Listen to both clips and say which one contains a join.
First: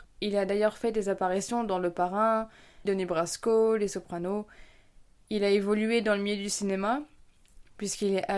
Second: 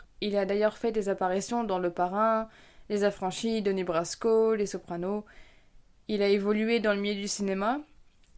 first; 1 cut; at 2.9 s

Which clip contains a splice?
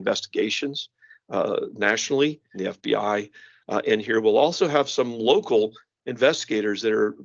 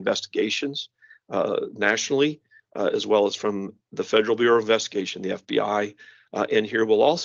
first; 1 cut; at 2.5 s

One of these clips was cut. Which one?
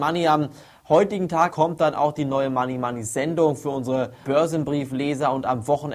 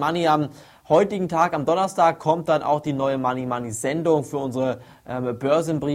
first; 2 cuts; at 1.5 s, 4.2 s

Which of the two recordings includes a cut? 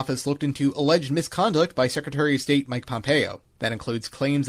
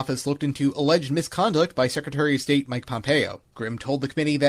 second; 1 cut; at 3.5 s

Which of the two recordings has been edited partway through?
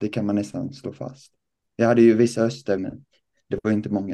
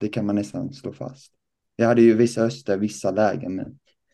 first; 1 cut; at 2.8 s

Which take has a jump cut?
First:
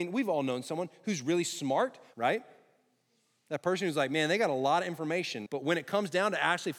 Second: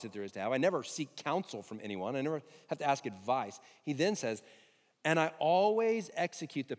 first; 2 cuts; at 2.1 s, 5.5 s

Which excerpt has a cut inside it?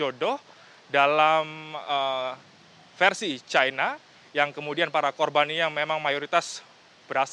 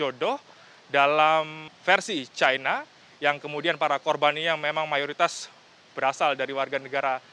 second; 1 cut; at 1.7 s

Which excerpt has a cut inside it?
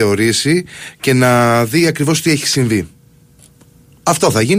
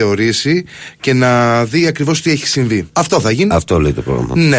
second; 1 cut; at 2.9 s

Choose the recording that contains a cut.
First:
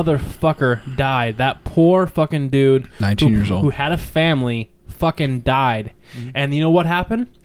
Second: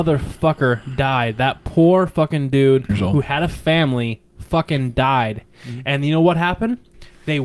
second; 1 cut; at 2.9 s

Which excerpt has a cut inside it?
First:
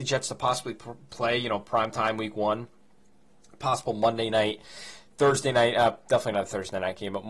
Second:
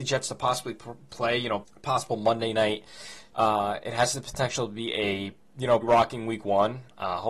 second; 3 cuts; at 1.6 s, 3.3 s, 5.8 s

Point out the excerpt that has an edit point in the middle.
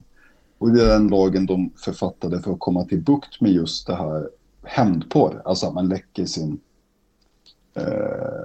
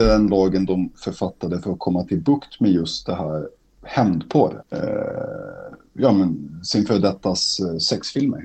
second; 1 cut; at 4.6 s

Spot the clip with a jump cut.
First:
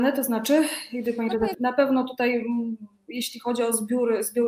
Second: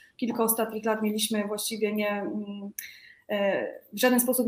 first; 1 cut; at 1.5 s

